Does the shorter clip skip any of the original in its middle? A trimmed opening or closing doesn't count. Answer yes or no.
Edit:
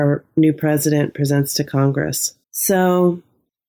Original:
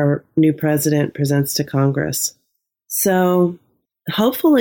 yes